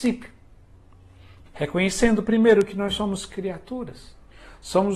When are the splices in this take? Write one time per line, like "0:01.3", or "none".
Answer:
0:01.5